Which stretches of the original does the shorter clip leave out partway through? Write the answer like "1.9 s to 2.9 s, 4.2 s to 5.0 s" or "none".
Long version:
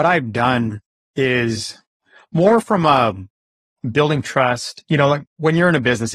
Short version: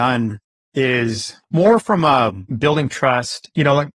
1.8 s to 2.2 s, 3.3 s to 3.8 s